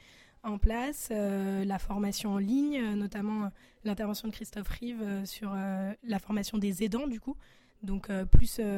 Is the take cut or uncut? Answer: uncut